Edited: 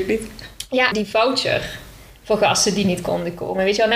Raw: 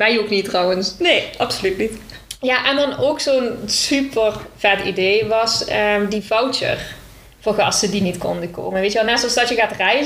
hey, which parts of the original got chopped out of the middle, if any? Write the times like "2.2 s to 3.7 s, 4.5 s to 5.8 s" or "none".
2.6 s to 6.1 s